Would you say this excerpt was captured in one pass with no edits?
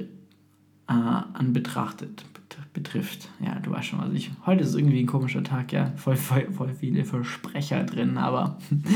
yes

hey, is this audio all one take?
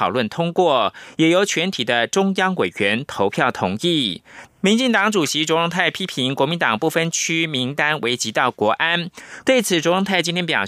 no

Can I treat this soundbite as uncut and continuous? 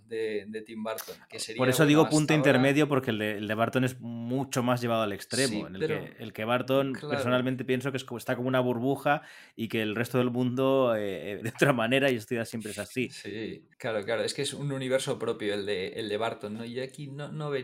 no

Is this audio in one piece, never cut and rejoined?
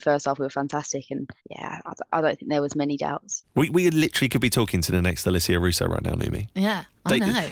no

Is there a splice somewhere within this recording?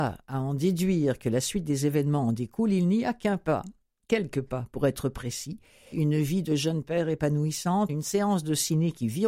yes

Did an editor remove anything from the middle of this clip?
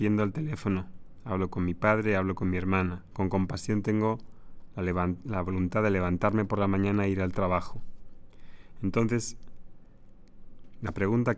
yes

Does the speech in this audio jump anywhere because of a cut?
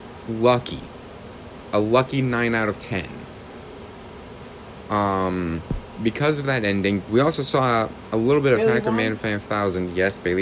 yes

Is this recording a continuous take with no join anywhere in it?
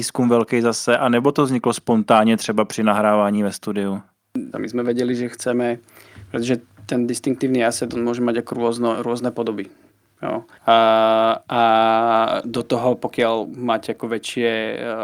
no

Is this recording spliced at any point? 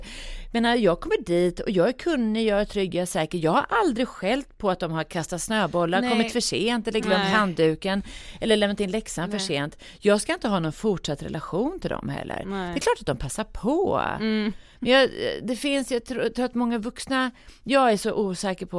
no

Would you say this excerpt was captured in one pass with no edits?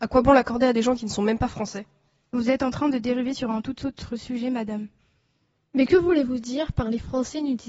yes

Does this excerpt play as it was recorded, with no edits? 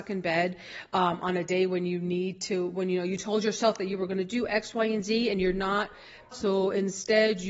no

